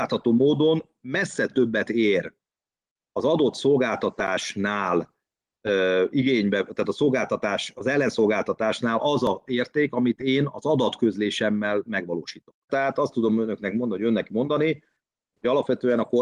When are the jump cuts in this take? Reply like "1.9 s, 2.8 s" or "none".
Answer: 12.7 s